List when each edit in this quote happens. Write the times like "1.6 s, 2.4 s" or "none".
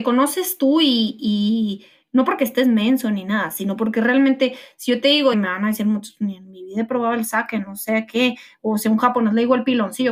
5.3 s